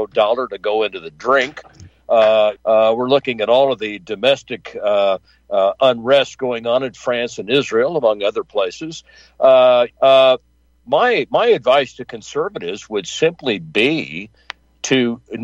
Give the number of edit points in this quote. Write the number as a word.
two